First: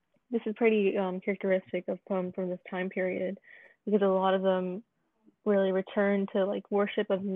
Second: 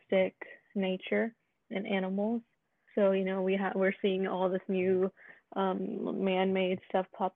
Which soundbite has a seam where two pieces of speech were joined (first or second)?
second